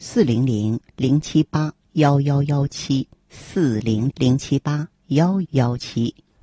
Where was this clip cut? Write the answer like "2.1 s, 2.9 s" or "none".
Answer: 4.1 s, 5.4 s